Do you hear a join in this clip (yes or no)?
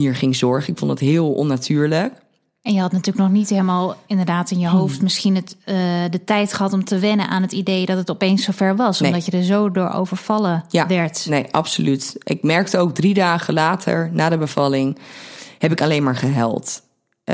no